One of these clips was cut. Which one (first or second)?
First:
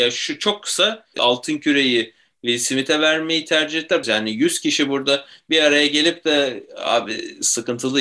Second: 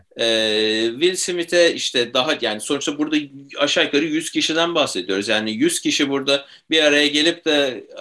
first